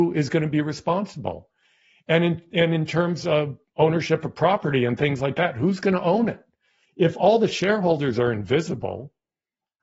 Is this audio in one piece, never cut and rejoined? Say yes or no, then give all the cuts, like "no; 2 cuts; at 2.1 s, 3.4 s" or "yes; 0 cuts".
yes; 0 cuts